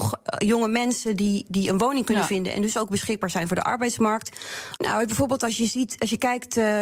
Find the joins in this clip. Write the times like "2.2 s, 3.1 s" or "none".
4.8 s